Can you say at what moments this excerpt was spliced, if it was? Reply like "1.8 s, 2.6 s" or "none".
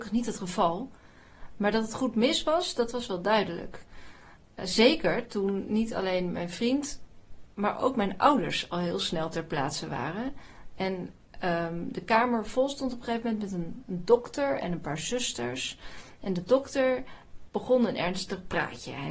none